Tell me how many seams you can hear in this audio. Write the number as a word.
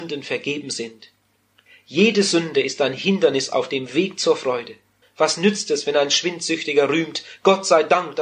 one